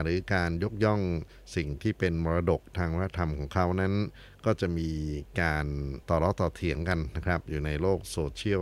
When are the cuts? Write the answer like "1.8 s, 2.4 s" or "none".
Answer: 6.0 s